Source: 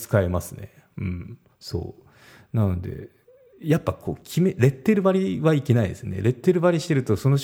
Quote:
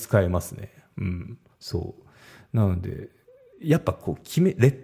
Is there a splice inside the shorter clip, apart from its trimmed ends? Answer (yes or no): no